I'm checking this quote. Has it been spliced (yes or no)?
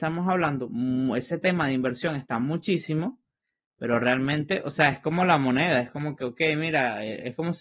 no